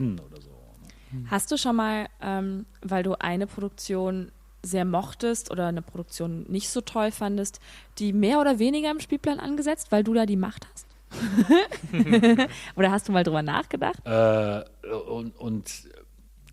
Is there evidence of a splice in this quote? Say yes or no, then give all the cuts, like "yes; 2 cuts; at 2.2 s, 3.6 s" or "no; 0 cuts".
yes; 1 cut; at 14.0 s